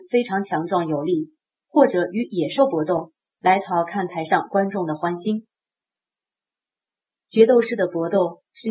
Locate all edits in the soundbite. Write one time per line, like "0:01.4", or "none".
0:01.5